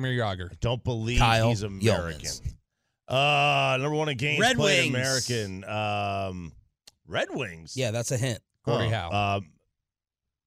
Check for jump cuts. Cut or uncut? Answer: uncut